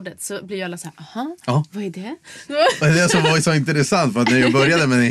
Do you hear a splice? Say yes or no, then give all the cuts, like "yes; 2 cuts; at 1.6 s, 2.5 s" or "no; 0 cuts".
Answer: no; 0 cuts